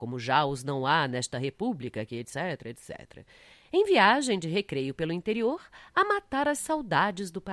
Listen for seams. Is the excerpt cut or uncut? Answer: cut